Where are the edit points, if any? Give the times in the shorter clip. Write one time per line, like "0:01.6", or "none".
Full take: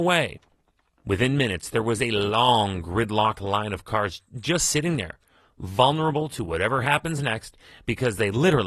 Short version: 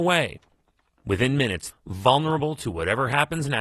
0:01.7